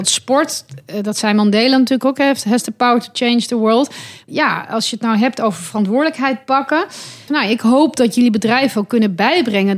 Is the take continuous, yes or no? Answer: no